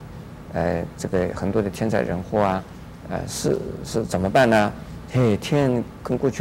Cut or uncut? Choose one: cut